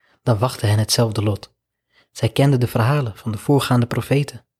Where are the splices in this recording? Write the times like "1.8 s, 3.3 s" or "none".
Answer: none